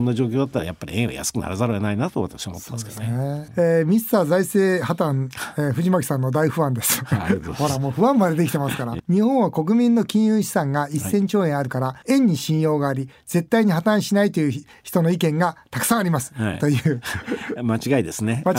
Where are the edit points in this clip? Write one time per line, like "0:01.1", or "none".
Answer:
0:09.0
0:12.0
0:16.5